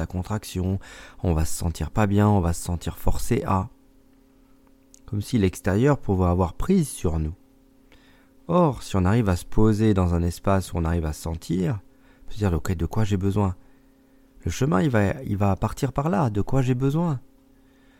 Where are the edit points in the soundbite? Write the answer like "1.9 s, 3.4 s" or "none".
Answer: none